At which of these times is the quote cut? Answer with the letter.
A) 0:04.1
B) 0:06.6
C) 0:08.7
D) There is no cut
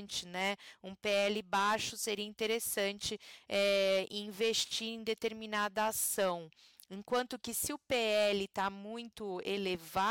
A